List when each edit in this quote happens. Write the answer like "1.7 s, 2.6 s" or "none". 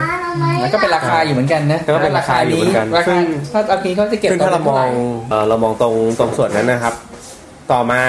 5.3 s